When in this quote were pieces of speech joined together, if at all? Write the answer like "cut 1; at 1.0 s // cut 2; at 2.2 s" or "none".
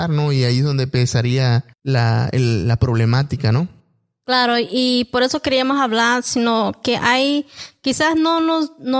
cut 1; at 1.7 s